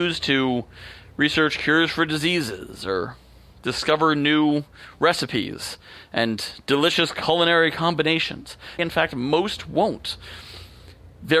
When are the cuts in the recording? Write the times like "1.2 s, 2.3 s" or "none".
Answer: 8.8 s